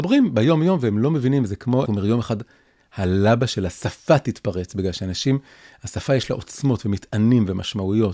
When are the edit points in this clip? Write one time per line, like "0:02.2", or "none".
0:01.9